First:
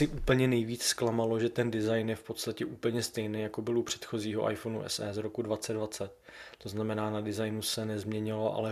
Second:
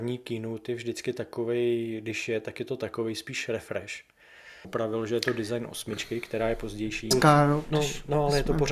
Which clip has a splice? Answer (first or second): second